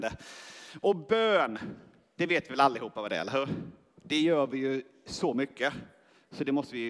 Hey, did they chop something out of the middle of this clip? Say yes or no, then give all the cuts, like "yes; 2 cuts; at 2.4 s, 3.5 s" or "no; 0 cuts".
no; 0 cuts